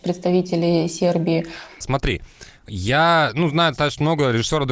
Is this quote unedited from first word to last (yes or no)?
no